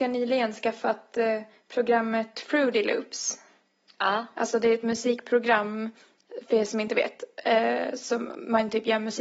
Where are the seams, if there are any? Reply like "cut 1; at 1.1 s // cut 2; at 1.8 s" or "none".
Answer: none